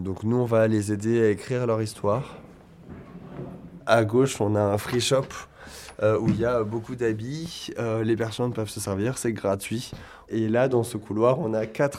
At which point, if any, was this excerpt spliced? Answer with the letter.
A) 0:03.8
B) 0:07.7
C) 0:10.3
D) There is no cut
A